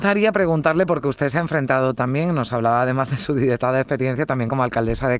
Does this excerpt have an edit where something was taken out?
no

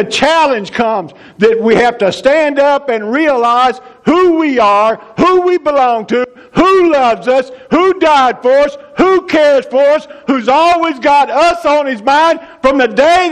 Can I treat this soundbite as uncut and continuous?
no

